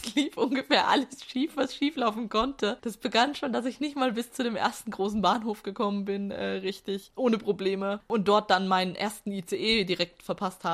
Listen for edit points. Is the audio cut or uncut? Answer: uncut